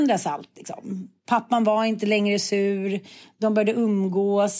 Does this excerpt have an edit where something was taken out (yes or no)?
no